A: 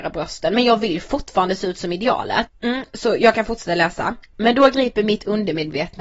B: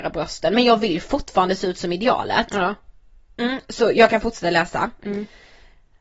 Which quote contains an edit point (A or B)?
A